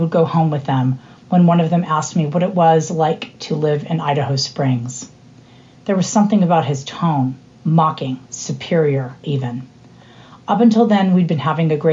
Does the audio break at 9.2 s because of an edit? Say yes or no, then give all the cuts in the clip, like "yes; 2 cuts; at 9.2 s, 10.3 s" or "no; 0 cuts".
yes; 1 cut; at 9.2 s